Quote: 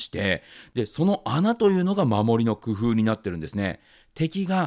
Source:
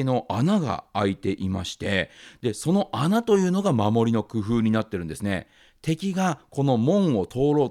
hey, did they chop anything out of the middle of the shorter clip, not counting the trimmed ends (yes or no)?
no